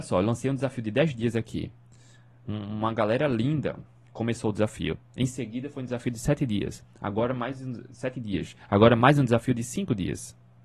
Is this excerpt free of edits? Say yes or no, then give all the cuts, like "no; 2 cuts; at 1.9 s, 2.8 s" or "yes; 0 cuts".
yes; 0 cuts